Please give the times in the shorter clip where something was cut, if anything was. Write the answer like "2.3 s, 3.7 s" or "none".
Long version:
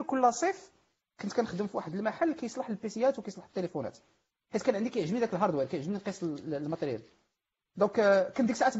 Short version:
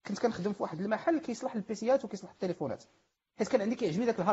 none